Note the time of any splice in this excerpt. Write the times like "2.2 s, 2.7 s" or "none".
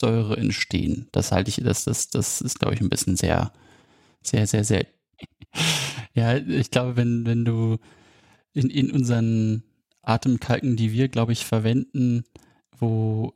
none